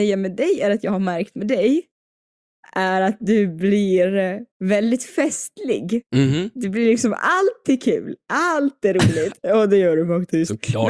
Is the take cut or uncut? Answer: cut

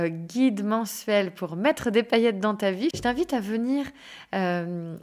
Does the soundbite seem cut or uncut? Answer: cut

